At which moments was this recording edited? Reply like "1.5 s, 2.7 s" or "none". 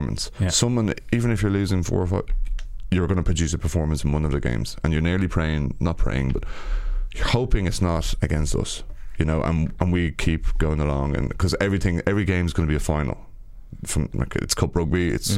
none